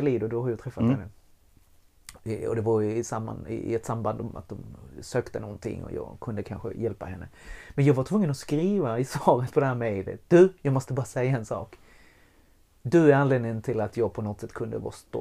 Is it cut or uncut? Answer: uncut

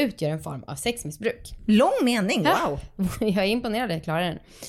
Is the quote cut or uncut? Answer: uncut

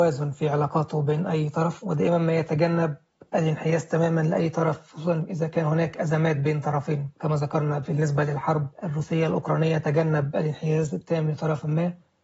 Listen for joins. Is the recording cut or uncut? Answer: uncut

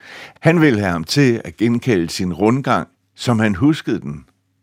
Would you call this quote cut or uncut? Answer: uncut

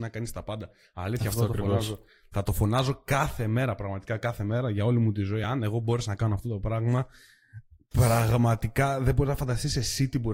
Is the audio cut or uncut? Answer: uncut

